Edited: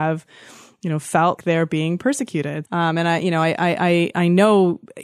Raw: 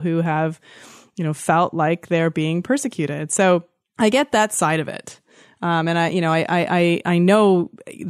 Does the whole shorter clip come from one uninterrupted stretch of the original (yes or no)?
no